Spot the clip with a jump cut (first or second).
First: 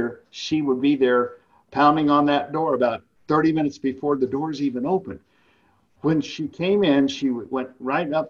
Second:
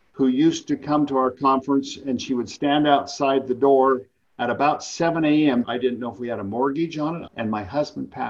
second